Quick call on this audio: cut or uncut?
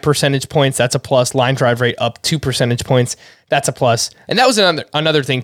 cut